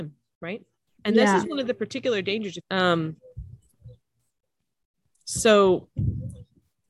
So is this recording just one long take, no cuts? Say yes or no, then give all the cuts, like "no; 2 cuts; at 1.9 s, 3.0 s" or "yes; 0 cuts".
no; 1 cut; at 2.6 s